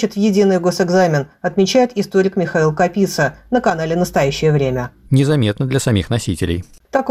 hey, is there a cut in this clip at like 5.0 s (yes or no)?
yes